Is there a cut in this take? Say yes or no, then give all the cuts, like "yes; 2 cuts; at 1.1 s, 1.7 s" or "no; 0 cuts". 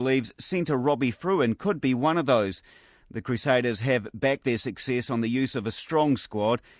no; 0 cuts